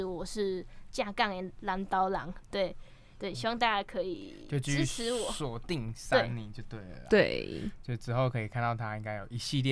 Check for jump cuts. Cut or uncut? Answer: uncut